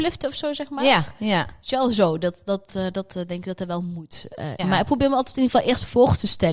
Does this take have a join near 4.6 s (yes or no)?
yes